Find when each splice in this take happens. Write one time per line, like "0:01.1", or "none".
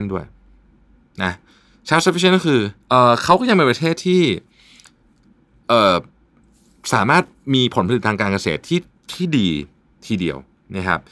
0:02.8